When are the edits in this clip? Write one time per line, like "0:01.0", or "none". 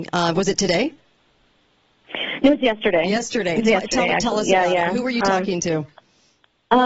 none